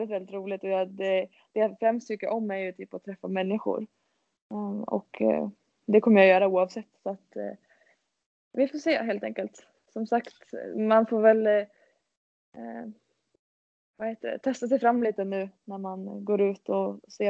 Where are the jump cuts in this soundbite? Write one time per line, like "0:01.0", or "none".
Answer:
none